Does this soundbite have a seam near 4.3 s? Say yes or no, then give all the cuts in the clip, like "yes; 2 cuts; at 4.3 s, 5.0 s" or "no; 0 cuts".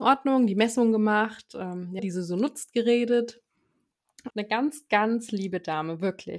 yes; 2 cuts; at 2.0 s, 4.3 s